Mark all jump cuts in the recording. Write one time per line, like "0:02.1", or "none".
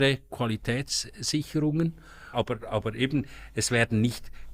0:02.3